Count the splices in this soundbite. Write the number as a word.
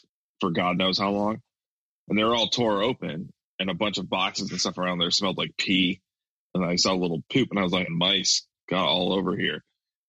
one